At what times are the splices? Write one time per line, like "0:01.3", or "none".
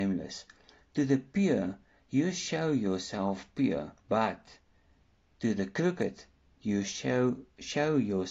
0:04.0